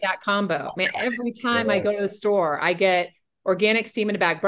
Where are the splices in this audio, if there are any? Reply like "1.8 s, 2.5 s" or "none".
none